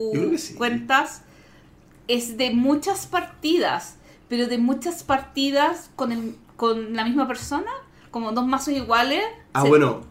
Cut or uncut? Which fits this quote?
uncut